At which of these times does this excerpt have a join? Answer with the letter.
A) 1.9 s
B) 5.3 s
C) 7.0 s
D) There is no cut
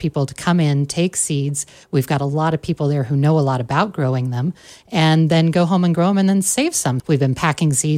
C